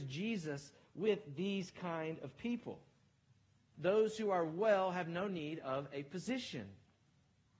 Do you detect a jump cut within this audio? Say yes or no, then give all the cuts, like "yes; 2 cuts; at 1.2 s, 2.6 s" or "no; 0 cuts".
yes; 1 cut; at 3.7 s